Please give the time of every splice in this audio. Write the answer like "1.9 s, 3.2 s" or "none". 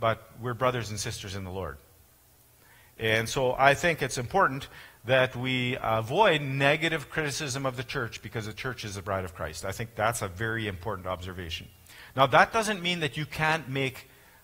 none